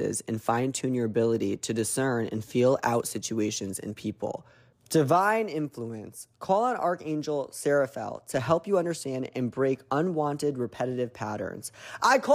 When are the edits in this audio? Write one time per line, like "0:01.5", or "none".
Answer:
0:04.7